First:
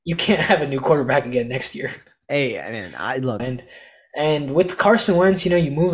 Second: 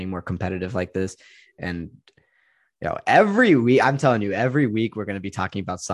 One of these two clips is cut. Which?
first; 1 cut; at 3.4 s

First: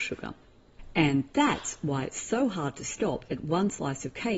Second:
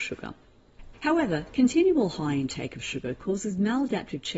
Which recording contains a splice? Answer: second; 1 cut; at 0.9 s

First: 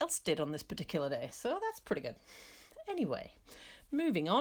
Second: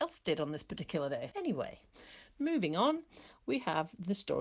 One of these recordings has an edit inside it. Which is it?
second; 1 cut; at 1.3 s

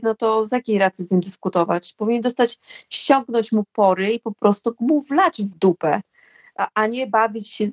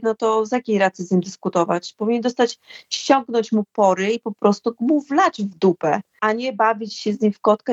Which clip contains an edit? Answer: second; 1 cut; at 6.2 s

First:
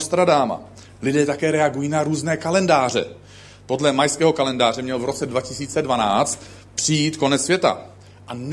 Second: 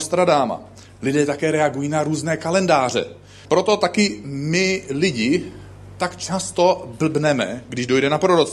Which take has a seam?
second; 1 cut; at 3.4 s

